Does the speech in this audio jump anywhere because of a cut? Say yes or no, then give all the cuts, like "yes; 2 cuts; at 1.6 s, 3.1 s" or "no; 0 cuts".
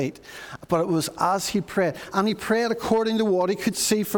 no; 0 cuts